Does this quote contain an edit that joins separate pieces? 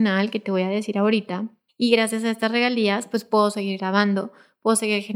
yes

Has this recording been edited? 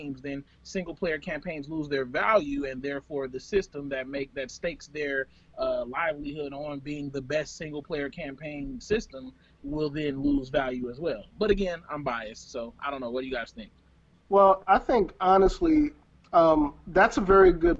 no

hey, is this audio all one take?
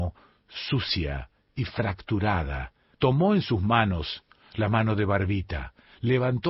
no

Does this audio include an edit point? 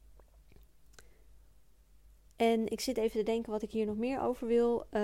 no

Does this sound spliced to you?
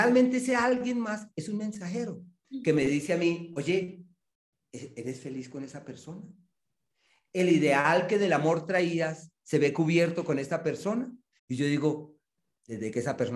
yes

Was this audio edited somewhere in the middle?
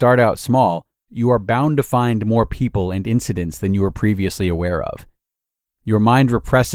yes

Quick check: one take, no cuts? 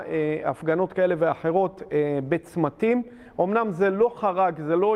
yes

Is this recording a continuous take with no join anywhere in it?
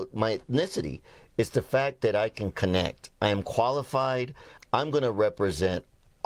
no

